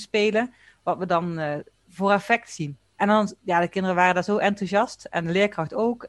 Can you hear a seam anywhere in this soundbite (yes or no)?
yes